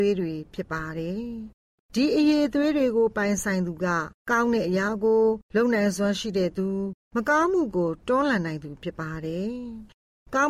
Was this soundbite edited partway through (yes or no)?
no